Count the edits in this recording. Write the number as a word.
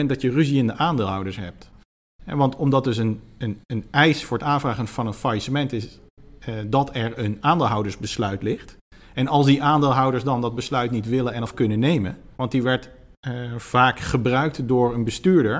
one